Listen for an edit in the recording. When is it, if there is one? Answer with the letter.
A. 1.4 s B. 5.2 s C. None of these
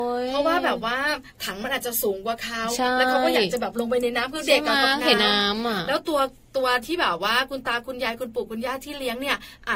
B